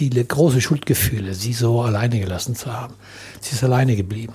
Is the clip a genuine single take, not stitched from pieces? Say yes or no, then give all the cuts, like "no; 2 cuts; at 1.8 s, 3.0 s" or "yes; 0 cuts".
no; 1 cut; at 3.4 s